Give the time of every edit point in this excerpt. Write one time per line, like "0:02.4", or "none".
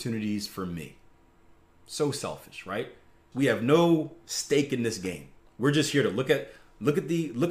0:03.3
0:05.5